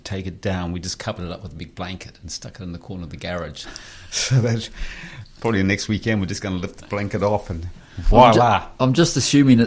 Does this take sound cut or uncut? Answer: uncut